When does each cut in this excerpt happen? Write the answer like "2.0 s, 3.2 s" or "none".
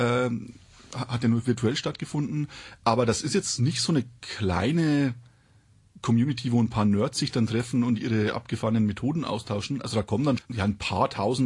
10.4 s